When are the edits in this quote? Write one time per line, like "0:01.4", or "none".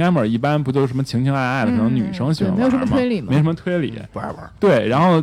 none